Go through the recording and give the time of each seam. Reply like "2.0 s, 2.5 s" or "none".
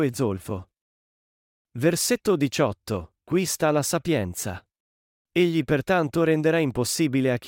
5.1 s